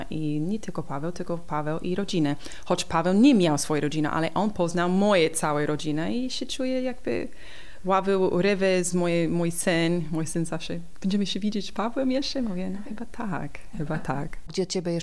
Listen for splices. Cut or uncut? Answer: uncut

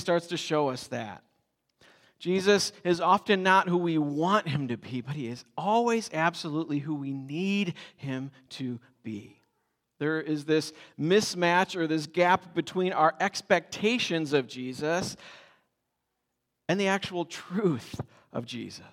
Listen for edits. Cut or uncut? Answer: cut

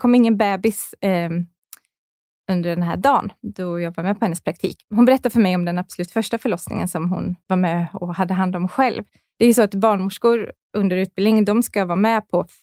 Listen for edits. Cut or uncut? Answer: cut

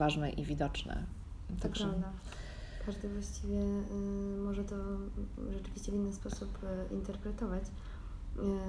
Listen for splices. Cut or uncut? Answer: uncut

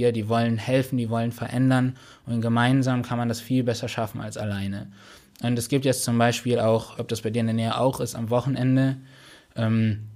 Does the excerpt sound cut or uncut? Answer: cut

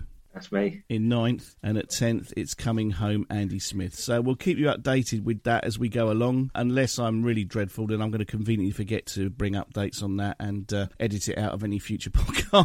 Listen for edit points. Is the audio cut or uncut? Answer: uncut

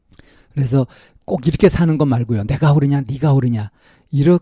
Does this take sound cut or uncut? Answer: uncut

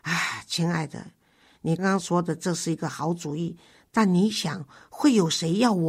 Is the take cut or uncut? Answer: cut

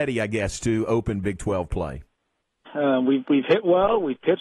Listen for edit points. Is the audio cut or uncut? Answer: cut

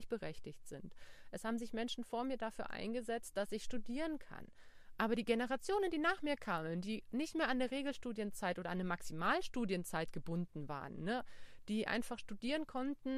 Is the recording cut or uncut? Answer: cut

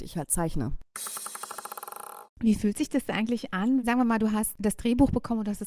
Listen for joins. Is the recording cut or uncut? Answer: cut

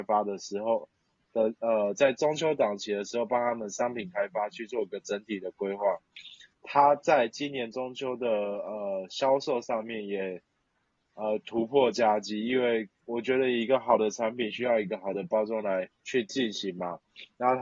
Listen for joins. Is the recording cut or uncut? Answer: cut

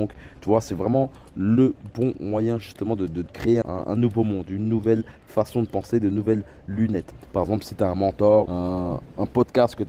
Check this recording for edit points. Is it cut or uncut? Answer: cut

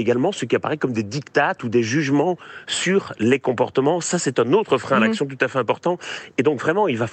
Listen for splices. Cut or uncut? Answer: uncut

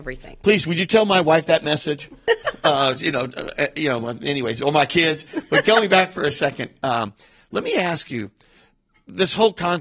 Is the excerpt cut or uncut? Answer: uncut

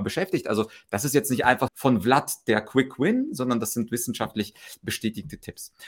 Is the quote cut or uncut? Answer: cut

